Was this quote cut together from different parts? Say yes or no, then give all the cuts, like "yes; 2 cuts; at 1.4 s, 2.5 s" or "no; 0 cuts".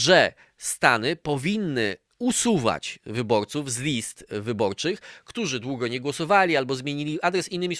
no; 0 cuts